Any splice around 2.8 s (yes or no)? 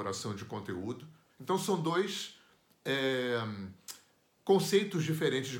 no